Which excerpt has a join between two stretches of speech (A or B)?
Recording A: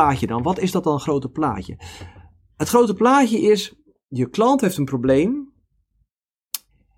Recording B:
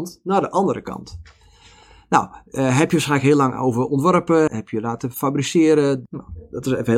B